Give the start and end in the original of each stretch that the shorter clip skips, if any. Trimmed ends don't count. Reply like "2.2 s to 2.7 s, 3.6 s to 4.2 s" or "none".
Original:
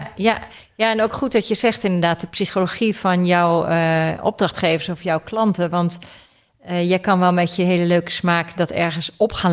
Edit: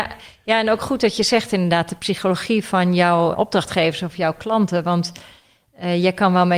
3.7 s to 4.2 s

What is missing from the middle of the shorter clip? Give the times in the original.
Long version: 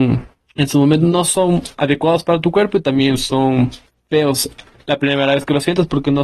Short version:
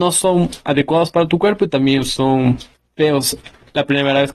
none

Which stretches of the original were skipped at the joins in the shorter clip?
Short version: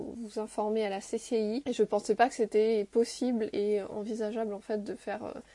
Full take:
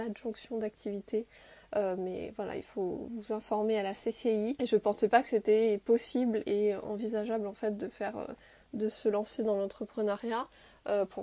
none

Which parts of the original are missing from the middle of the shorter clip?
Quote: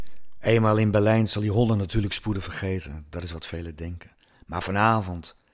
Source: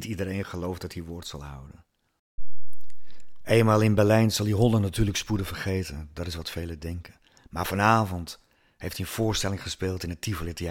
none

